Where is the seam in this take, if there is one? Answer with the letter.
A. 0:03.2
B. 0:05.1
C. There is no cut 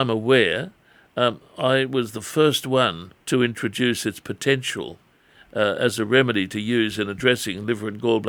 A